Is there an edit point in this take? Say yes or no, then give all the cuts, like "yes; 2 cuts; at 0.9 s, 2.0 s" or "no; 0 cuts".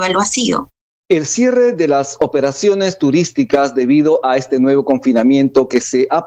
yes; 1 cut; at 1.0 s